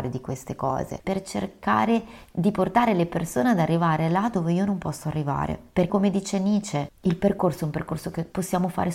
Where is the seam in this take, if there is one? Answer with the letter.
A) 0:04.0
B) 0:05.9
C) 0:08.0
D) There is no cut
B